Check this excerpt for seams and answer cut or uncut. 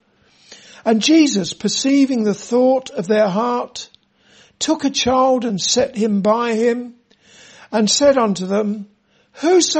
uncut